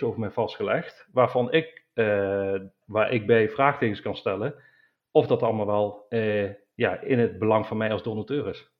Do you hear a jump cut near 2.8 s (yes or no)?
yes